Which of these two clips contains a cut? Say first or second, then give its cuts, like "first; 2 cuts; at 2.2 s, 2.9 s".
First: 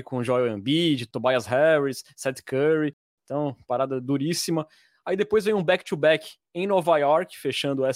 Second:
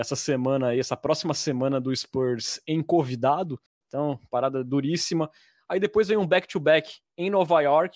second; 1 cut; at 3.7 s